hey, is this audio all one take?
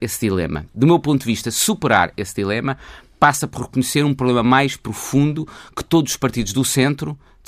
yes; 0 cuts

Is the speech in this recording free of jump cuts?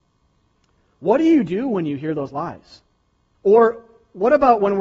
no; 1 cut; at 3.3 s

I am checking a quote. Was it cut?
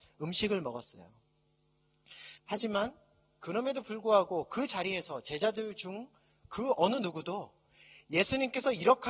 yes; 1 cut; at 2.4 s

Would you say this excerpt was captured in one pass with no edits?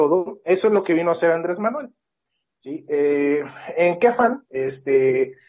no; 1 cut; at 4.4 s

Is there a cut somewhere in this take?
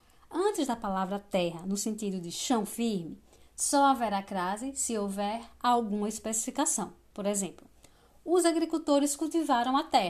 no; 0 cuts

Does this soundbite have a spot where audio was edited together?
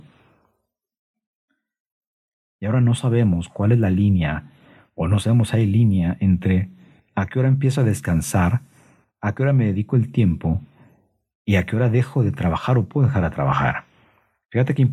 no; 0 cuts

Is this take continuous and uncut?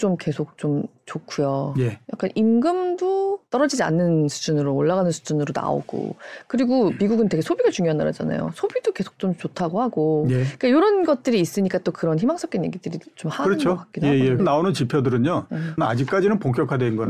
no; 2 cuts; at 14.4 s, 15.8 s

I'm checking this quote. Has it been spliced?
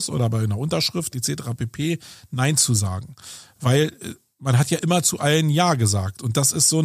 no; 0 cuts

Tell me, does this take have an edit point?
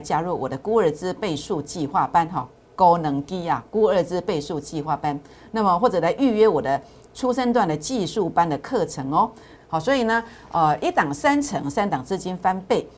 yes; 1 cut; at 9.6 s

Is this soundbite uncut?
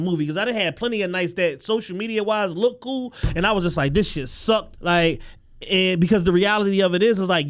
no; 1 cut; at 4.8 s

